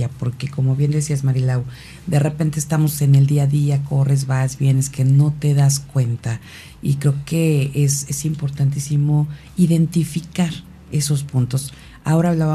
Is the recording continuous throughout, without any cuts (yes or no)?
yes